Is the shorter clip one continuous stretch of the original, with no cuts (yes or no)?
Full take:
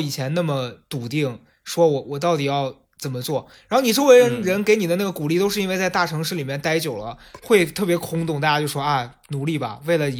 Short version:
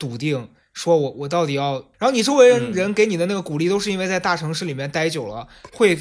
no